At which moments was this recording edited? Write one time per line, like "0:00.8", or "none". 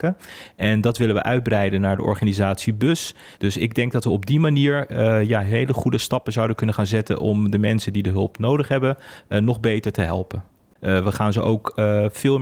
0:03.4
0:10.8

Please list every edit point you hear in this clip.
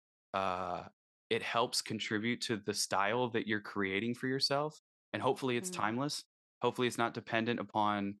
none

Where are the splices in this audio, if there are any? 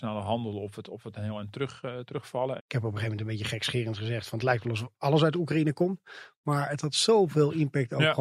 0:02.6

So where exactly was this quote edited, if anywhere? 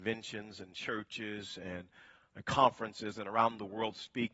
none

